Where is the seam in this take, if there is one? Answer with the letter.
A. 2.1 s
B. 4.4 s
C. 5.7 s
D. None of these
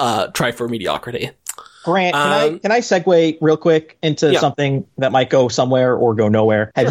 D